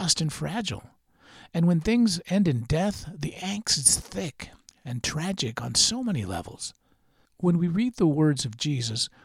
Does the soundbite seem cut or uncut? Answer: uncut